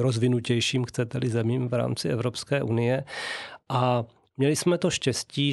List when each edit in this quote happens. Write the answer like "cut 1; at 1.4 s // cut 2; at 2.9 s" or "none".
none

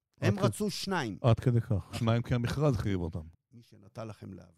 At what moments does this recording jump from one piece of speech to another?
cut 1; at 3.3 s

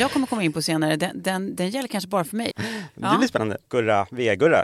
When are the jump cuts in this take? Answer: cut 1; at 2.5 s // cut 2; at 3.7 s

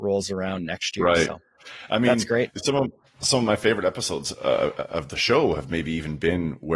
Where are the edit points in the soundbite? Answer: none

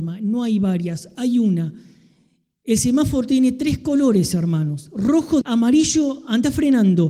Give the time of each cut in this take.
cut 1; at 5.4 s

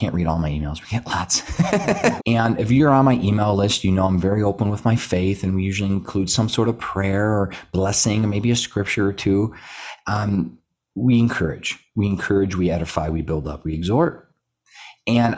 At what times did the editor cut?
cut 1; at 2.2 s

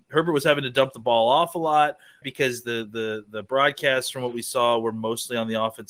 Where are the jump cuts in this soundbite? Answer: cut 1; at 2.2 s

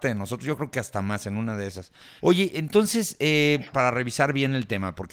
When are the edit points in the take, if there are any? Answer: cut 1; at 2.2 s // cut 2; at 3.7 s

